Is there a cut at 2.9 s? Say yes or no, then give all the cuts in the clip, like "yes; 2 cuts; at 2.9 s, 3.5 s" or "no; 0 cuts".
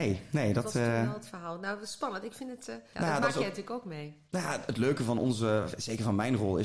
yes; 1 cut; at 2.9 s